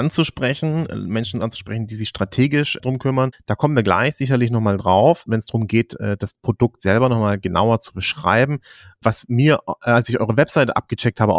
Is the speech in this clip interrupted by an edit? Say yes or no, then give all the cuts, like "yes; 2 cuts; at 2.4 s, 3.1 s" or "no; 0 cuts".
yes; 1 cut; at 3.3 s